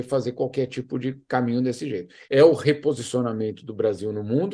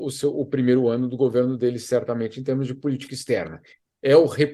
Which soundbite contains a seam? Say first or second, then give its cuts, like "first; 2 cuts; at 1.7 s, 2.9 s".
first; 1 cut; at 2.2 s